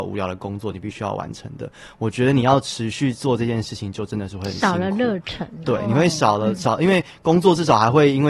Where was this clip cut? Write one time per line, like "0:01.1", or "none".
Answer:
none